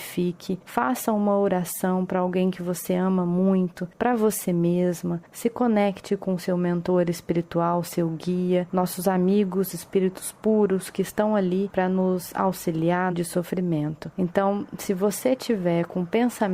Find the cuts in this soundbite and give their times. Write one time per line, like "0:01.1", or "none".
0:13.1
0:14.1